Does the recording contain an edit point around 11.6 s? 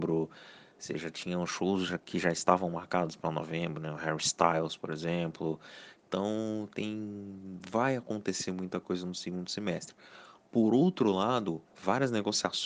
yes; 1 cut; at 11.6 s

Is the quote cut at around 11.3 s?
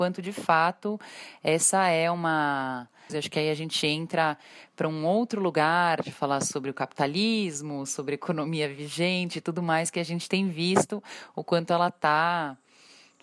no; 1 cut; at 3.1 s

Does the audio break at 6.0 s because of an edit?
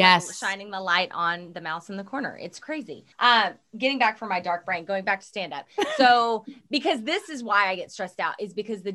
no; 1 cut; at 3.1 s

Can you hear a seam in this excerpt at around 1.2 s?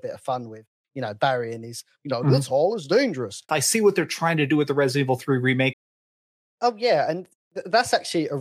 no; 2 cuts; at 3.5 s, 5.7 s

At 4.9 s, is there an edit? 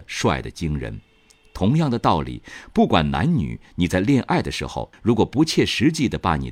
yes; 1 cut; at 4.9 s

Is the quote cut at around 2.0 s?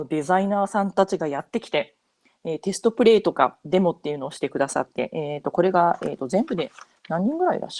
no; 0 cuts

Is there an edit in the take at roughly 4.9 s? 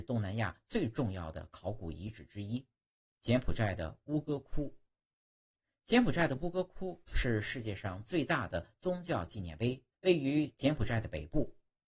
no; 2 cuts; at 3.2 s, 9.9 s

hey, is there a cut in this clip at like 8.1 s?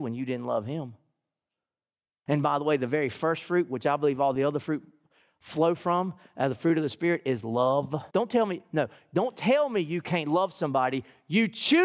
yes; 2 cuts; at 2.3 s, 8.1 s

